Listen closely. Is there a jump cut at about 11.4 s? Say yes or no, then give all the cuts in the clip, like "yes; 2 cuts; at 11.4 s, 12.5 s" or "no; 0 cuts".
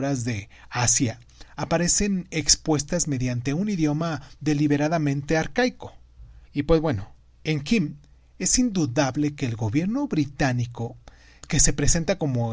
yes; 2 cuts; at 6.4 s, 11.4 s